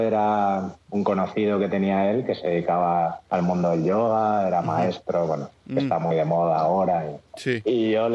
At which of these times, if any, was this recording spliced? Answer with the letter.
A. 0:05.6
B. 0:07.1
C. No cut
A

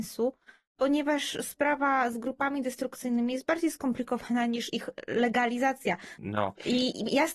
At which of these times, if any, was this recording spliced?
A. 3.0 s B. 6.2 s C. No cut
B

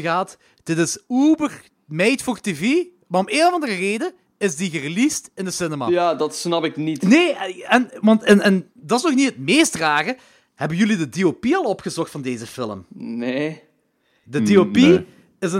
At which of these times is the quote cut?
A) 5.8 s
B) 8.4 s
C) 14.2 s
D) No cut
D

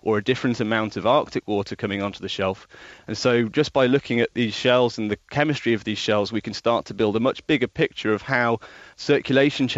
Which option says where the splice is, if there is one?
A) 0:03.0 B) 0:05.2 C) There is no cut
A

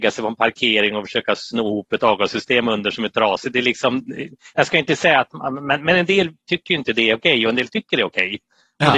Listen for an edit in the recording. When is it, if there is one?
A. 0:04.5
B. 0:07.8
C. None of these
C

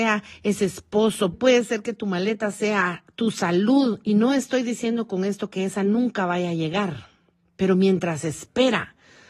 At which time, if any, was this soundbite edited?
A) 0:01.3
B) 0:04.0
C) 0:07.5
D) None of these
A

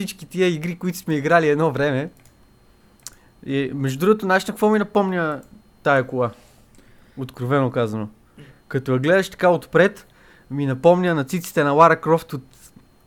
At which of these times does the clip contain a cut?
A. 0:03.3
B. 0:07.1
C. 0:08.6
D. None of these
D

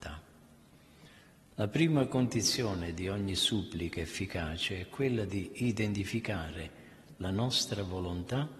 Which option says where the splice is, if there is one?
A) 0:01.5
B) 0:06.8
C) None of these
C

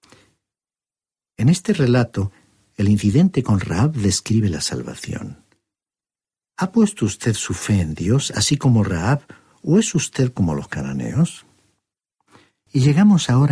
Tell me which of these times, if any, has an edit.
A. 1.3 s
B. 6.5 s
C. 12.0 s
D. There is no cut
D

